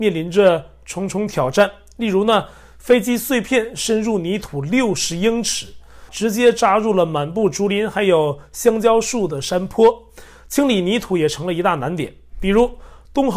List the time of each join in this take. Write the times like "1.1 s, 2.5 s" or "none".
6.1 s